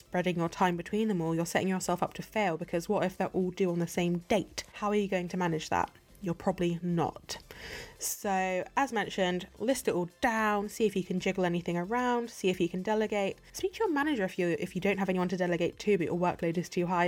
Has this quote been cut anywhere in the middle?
no; 0 cuts

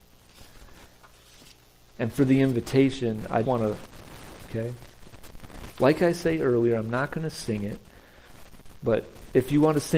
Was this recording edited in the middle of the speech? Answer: yes; 2 cuts; at 3.4 s, 4.5 s

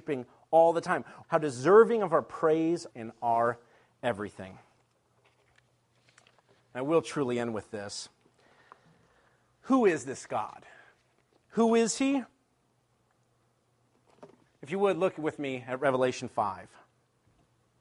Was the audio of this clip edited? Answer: yes; 3 cuts; at 1.2 s, 2.9 s, 14.5 s

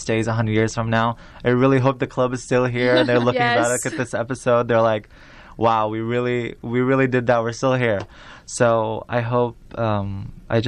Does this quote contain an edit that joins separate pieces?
no; 0 cuts

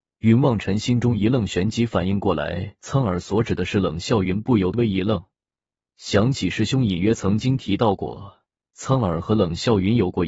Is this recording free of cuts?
no; 1 cut; at 4.7 s

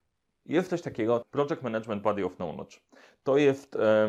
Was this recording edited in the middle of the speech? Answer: yes; 1 cut; at 1.2 s

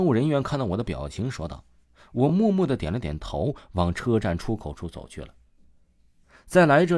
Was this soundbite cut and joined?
no; 0 cuts

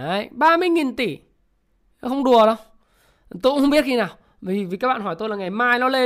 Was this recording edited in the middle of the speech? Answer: no; 0 cuts

